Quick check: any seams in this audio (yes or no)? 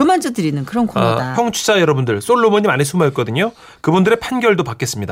yes